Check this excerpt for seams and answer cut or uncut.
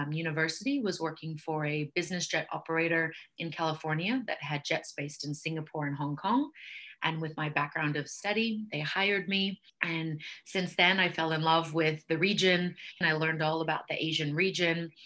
cut